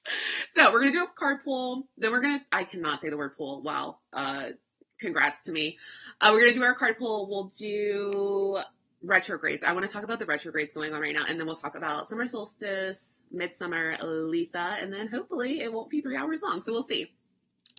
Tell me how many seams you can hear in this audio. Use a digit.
0